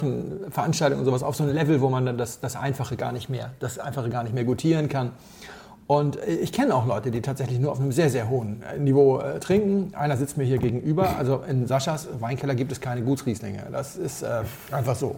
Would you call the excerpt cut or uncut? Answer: uncut